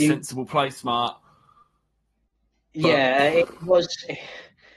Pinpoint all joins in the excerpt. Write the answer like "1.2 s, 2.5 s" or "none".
none